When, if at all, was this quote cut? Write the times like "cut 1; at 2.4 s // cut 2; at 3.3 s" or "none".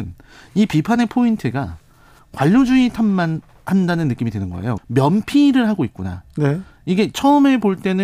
cut 1; at 4.8 s